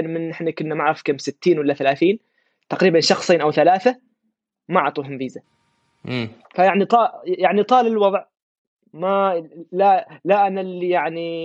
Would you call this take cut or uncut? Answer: cut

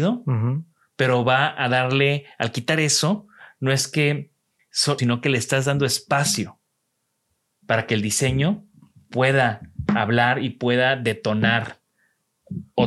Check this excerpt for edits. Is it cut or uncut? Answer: cut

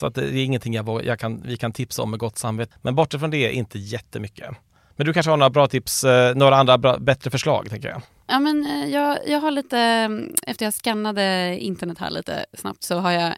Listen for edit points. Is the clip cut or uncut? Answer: cut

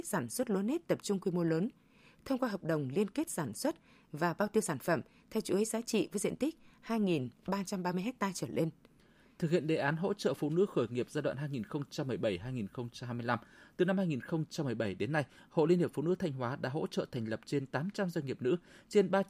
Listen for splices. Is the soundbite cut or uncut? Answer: uncut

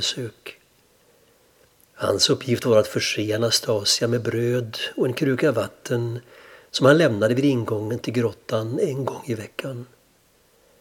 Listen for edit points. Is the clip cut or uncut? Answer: cut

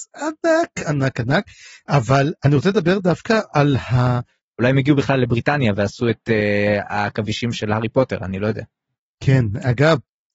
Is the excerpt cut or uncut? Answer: cut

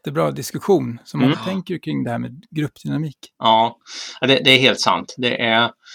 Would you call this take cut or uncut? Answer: cut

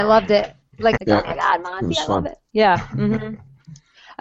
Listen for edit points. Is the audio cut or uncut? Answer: cut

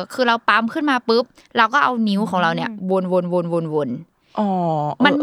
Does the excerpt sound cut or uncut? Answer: uncut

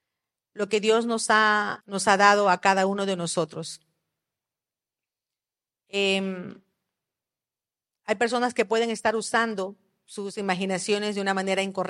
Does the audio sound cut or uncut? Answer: cut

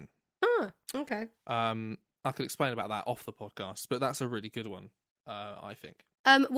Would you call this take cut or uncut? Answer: uncut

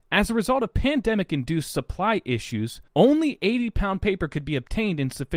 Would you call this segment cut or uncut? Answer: cut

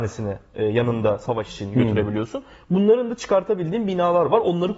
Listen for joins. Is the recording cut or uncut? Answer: uncut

